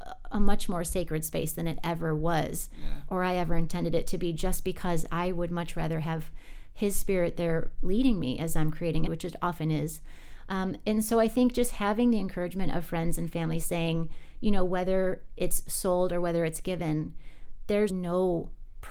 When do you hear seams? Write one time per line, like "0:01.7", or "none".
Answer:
0:09.1
0:17.9